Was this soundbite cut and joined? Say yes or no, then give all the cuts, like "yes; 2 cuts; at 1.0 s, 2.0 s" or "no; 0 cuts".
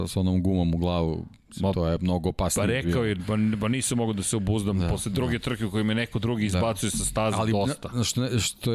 no; 0 cuts